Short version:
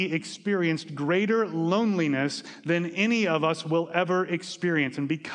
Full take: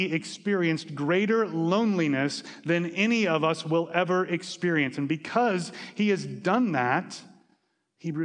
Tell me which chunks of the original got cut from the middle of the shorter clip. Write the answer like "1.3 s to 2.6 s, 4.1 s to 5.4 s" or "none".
none